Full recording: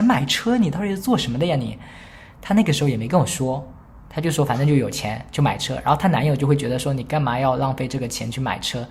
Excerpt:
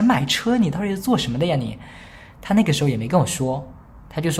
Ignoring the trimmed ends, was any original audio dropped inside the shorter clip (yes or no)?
no